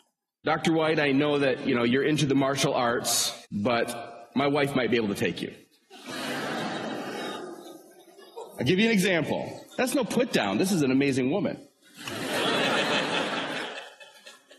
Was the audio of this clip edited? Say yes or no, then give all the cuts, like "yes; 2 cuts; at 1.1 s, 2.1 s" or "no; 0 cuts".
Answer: yes; 1 cut; at 3.5 s